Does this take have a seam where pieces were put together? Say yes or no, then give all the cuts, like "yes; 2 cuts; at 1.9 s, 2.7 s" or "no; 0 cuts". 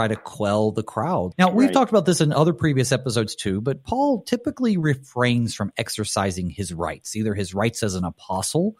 yes; 1 cut; at 1.3 s